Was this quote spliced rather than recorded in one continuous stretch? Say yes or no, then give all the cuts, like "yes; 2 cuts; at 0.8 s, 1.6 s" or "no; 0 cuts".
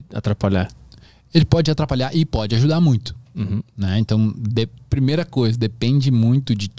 no; 0 cuts